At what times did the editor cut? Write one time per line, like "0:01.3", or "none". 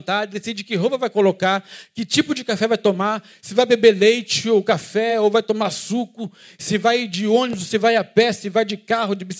none